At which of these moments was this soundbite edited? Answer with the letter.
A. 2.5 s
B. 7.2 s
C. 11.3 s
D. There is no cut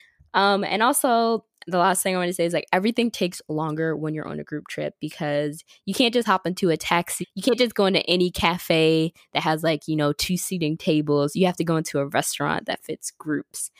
B